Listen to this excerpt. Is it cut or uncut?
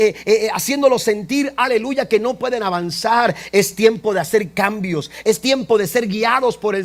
cut